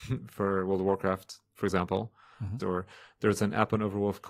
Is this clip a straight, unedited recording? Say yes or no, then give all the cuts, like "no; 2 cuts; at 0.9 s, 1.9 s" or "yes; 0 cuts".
no; 1 cut; at 2.6 s